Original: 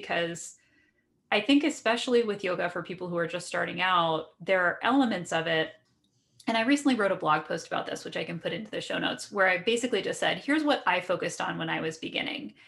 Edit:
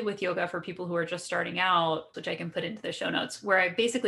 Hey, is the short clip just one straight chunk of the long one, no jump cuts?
no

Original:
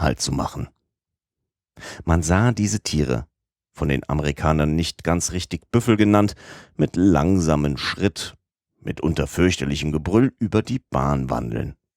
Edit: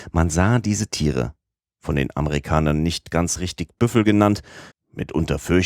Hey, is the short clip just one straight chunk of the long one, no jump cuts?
no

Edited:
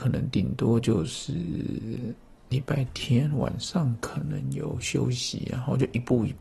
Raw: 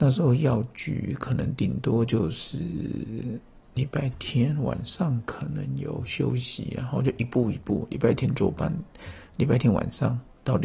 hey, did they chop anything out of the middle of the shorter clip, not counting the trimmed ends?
no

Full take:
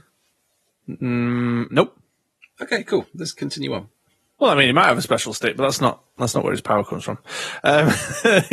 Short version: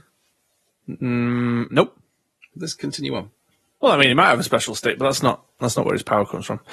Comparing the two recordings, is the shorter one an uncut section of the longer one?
no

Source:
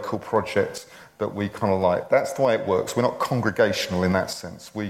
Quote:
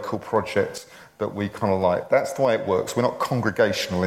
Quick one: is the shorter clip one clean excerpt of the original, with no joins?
yes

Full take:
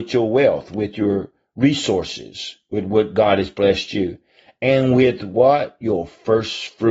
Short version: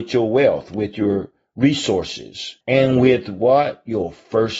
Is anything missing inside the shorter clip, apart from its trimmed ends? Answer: yes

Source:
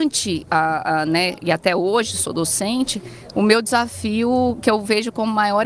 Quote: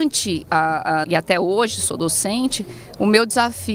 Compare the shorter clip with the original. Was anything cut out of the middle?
yes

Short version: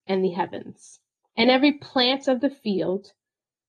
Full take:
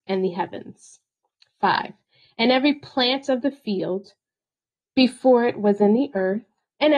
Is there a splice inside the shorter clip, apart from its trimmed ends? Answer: yes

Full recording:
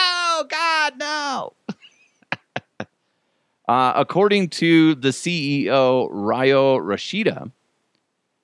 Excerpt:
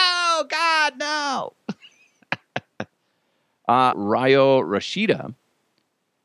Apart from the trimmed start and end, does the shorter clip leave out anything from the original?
yes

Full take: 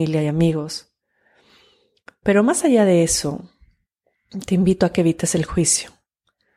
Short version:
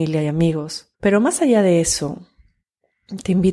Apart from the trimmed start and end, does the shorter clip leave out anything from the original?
yes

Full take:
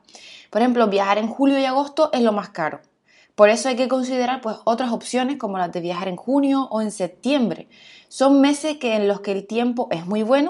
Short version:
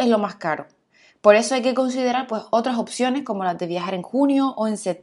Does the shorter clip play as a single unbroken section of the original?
yes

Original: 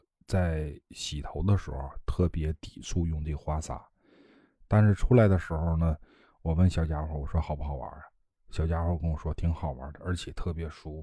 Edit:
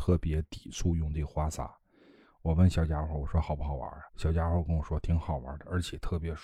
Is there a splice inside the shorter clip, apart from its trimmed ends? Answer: yes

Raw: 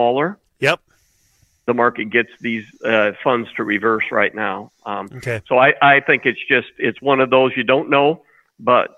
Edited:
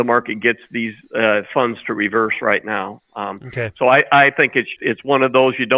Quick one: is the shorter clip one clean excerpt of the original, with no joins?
no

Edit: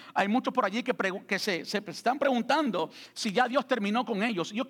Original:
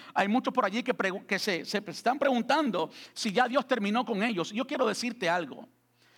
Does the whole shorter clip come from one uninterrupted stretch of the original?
yes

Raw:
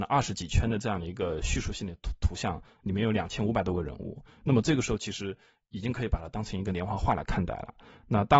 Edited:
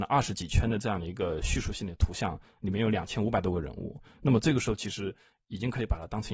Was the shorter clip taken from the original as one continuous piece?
no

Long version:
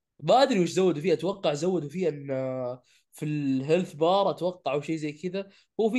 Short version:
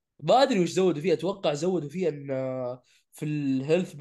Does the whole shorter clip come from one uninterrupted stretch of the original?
yes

